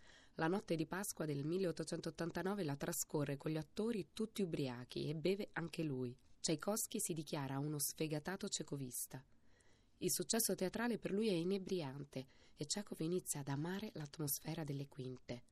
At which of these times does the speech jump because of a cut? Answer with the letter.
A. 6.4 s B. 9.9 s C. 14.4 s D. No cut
A